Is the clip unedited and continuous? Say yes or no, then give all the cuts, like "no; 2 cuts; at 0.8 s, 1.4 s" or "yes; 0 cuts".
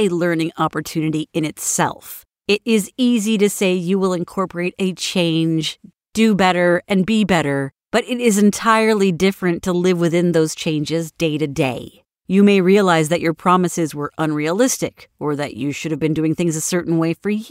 yes; 0 cuts